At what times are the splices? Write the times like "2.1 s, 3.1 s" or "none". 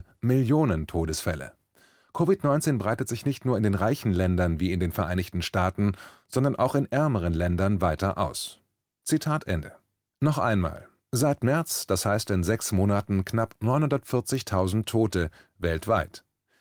10.1 s